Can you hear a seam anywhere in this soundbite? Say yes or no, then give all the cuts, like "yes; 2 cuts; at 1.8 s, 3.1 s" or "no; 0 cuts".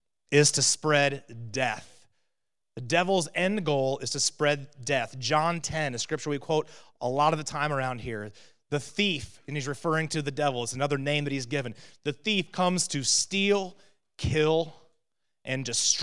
yes; 1 cut; at 5.6 s